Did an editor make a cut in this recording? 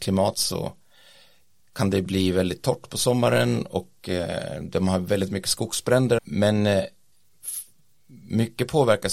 yes; 1 cut; at 6.2 s

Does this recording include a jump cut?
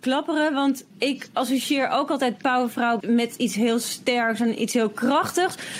yes; 2 cuts; at 0.9 s, 3.0 s

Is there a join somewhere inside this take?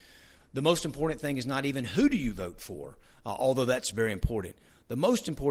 no; 0 cuts

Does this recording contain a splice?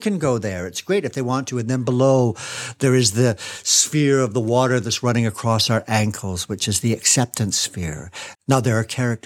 yes; 1 cut; at 8.3 s

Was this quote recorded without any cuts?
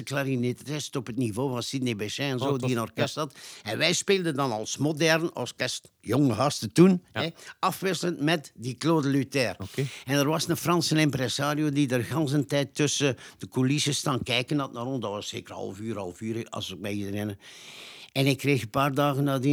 yes; 0 cuts

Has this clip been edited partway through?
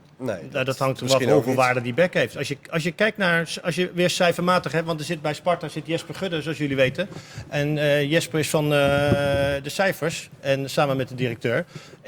no; 0 cuts

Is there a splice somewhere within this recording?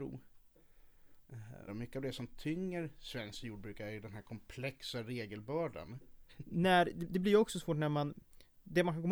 yes; 2 cuts; at 1.7 s, 6.3 s

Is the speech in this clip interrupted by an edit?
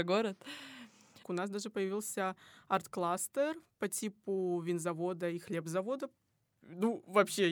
yes; 1 cut; at 1.2 s

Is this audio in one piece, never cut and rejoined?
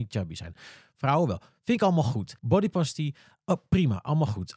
no; 1 cut; at 2.4 s

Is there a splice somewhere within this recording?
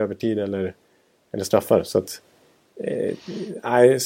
no; 0 cuts

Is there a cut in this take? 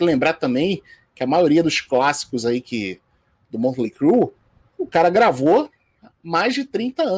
no; 0 cuts

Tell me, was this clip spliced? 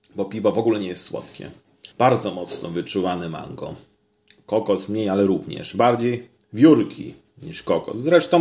yes; 1 cut; at 1.9 s

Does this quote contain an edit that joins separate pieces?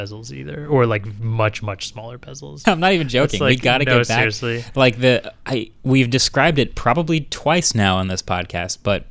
yes; 1 cut; at 2.6 s

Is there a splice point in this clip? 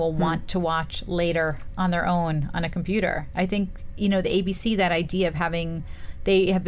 no; 0 cuts

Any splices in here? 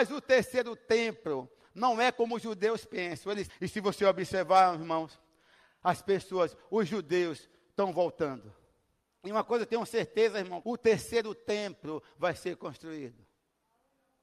yes; 3 cuts; at 3.5 s, 9.1 s, 10.6 s

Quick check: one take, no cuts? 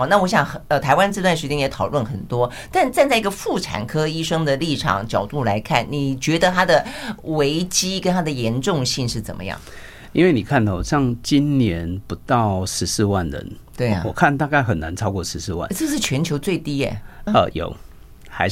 no; 1 cut; at 17.3 s

